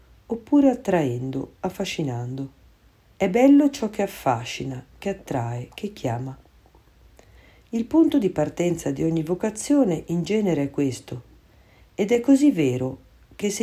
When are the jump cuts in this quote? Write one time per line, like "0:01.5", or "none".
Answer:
0:03.1